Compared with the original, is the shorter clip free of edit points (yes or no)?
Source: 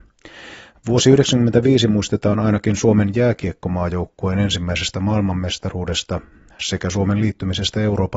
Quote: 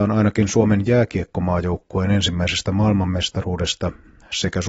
yes